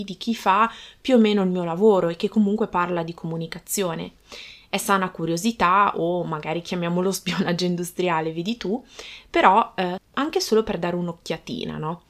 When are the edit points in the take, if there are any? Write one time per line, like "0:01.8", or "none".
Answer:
0:10.0

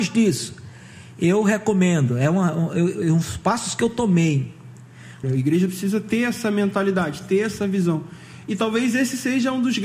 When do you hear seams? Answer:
0:05.2

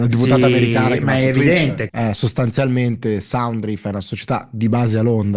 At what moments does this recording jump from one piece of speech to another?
0:01.9

